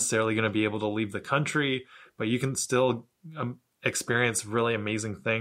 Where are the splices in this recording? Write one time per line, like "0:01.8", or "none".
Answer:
none